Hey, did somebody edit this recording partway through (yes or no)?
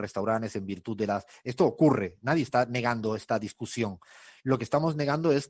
no